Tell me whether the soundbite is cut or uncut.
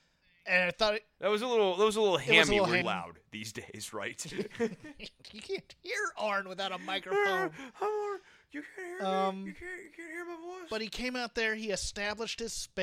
cut